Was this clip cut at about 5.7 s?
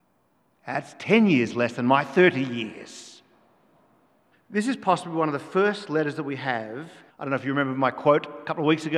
no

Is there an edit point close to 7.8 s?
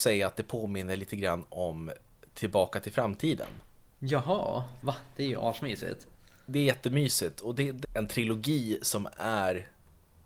yes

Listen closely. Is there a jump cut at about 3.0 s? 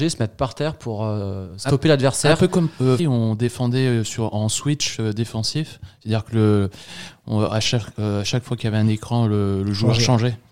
yes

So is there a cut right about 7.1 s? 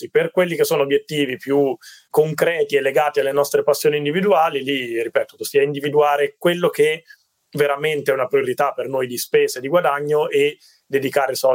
no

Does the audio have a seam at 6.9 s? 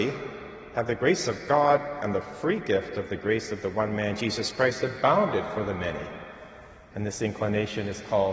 yes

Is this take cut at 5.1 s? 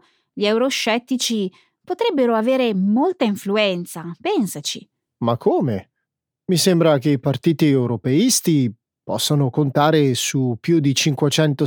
no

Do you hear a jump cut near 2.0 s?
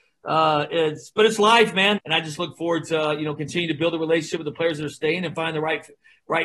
yes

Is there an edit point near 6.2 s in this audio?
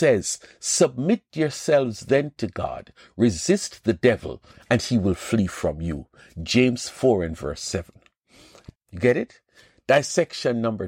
no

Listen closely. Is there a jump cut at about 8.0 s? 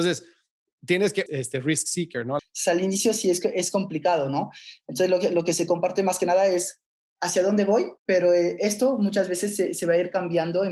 yes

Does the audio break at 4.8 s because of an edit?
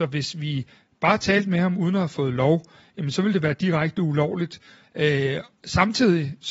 yes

